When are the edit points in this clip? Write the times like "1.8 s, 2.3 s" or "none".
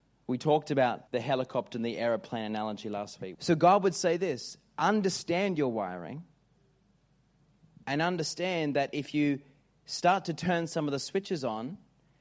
1.1 s, 3.3 s